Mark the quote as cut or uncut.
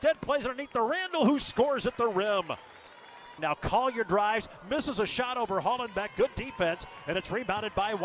cut